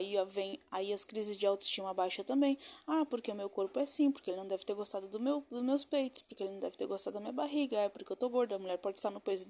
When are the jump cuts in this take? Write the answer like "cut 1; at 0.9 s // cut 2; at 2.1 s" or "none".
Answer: none